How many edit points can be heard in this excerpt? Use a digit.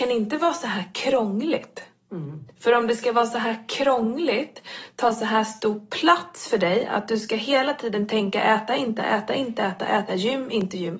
2